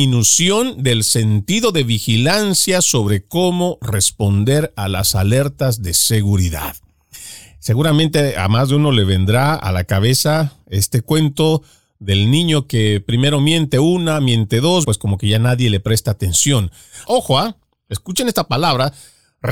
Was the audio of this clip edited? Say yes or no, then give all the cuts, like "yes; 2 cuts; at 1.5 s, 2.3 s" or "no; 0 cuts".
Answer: yes; 2 cuts; at 14.8 s, 17.0 s